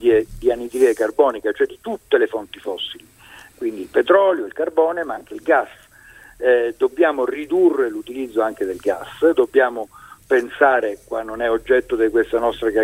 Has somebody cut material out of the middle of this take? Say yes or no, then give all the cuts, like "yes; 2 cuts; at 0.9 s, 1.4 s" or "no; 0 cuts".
no; 0 cuts